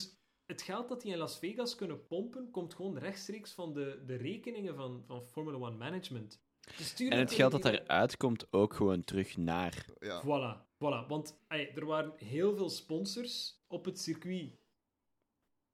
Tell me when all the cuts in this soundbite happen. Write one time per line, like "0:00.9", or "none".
none